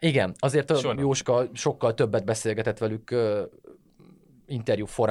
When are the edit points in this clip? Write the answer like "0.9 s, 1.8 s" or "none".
0.9 s